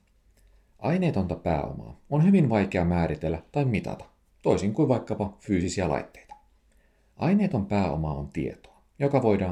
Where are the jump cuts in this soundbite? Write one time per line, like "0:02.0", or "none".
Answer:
none